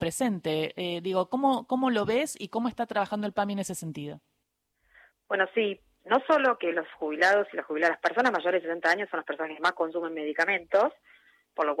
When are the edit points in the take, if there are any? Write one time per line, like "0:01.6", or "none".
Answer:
none